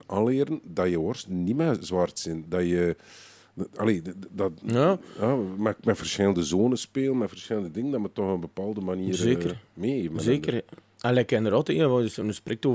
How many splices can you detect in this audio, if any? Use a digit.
0